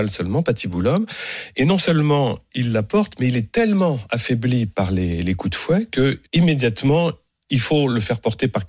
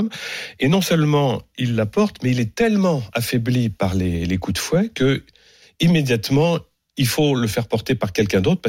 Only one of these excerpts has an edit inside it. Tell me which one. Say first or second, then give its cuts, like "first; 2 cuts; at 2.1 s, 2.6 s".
first; 1 cut; at 6.3 s